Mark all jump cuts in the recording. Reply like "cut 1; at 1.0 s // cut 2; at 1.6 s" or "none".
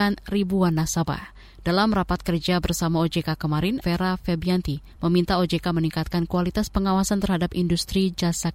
cut 1; at 3.8 s